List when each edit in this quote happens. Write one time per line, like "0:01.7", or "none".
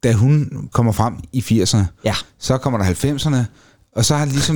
none